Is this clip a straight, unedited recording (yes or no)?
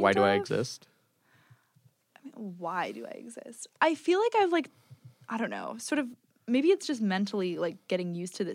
no